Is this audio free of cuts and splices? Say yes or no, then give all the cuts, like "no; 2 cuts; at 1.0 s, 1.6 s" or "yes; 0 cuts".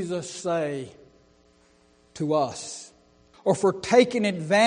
no; 1 cut; at 3.3 s